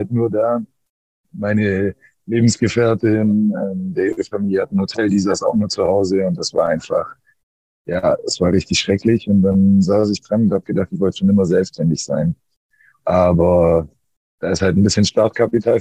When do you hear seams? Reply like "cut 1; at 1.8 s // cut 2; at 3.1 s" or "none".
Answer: cut 1; at 13.0 s